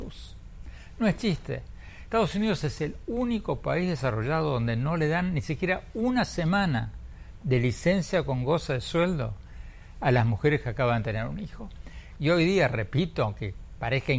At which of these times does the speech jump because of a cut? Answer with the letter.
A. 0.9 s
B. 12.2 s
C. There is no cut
B